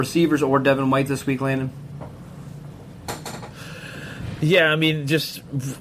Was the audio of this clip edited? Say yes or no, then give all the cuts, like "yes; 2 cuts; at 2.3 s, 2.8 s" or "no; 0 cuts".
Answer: no; 0 cuts